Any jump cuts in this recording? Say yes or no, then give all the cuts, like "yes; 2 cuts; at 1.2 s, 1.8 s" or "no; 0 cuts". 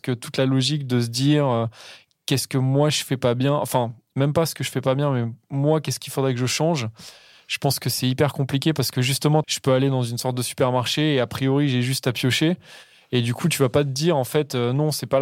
yes; 1 cut; at 9.4 s